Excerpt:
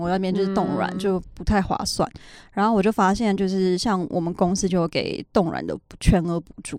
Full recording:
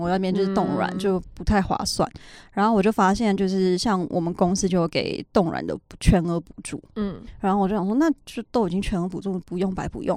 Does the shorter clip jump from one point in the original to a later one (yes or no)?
no